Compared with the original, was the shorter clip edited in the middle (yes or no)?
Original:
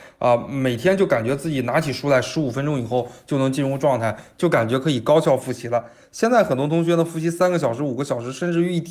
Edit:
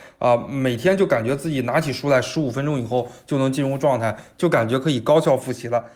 no